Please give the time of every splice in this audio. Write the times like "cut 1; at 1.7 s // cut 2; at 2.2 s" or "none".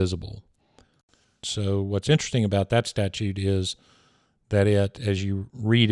cut 1; at 1.4 s